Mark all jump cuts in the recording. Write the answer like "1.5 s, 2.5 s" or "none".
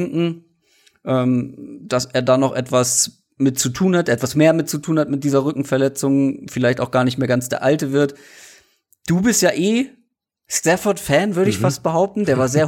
none